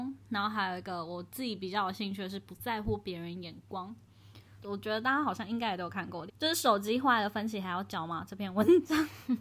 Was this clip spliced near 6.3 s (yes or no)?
yes